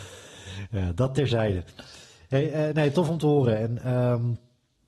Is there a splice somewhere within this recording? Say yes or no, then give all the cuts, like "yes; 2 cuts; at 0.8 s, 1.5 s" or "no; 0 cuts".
no; 0 cuts